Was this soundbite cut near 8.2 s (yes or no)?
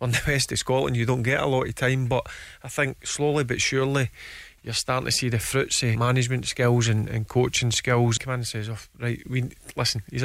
yes